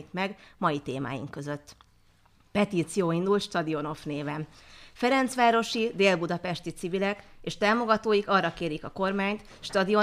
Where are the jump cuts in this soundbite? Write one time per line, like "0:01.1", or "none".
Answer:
none